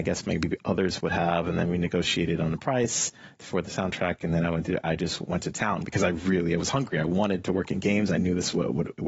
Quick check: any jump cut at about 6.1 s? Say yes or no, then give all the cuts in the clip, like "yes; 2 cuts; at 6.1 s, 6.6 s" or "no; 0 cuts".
no; 0 cuts